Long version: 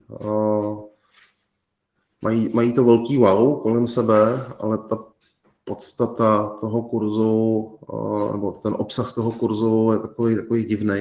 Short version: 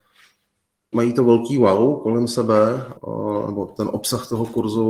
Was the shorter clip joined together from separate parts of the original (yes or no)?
yes